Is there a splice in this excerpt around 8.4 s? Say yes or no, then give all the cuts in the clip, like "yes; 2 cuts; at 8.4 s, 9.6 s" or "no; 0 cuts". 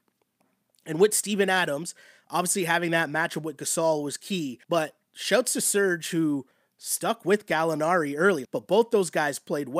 yes; 2 cuts; at 4.6 s, 8.4 s